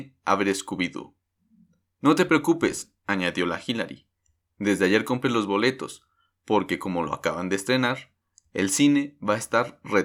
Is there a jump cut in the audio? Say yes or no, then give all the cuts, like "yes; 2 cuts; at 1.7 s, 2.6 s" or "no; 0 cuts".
no; 0 cuts